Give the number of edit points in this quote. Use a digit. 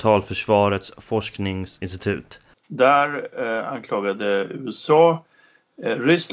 1